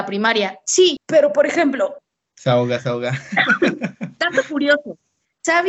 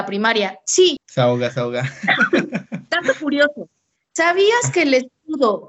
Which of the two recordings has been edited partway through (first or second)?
second